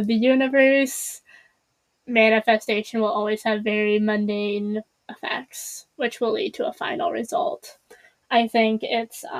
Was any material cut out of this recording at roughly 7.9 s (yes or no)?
no